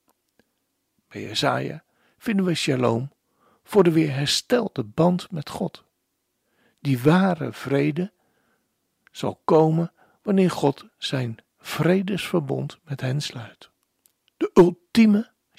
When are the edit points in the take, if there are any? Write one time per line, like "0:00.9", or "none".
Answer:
0:14.3